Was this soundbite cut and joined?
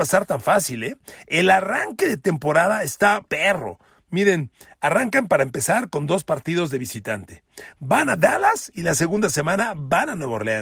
yes; 1 cut; at 3.2 s

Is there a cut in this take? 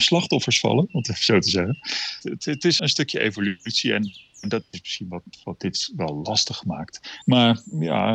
yes; 2 cuts; at 2.8 s, 7.2 s

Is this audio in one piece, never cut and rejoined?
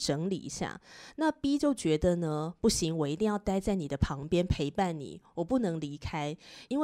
yes; 0 cuts

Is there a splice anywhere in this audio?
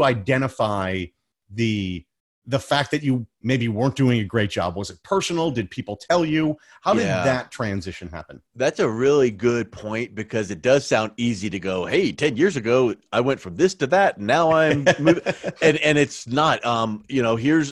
no; 0 cuts

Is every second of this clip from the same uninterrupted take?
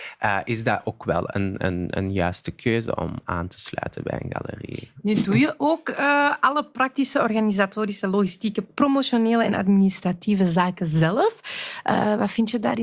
yes; 0 cuts

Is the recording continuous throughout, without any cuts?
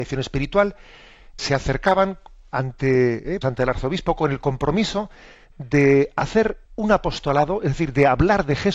no; 3 cuts; at 1.4 s, 3.4 s, 6.6 s

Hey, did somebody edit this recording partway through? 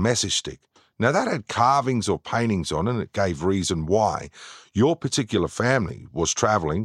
no; 0 cuts

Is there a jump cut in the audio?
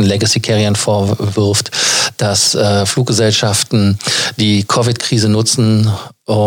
no; 0 cuts

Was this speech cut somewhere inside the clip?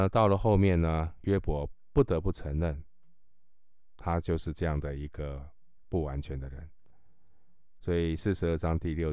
yes; 1 cut; at 1.2 s

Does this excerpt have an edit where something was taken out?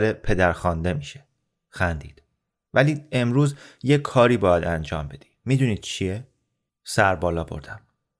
no; 0 cuts

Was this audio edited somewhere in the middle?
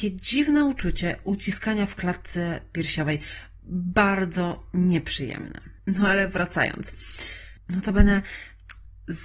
yes; 2 cuts; at 5.8 s, 7.6 s

